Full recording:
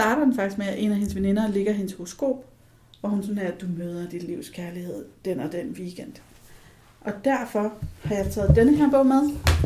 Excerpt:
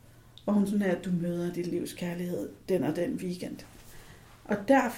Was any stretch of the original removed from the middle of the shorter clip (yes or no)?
no